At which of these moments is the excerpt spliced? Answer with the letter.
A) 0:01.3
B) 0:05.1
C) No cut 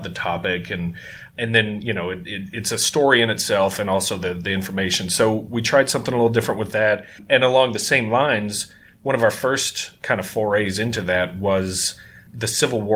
A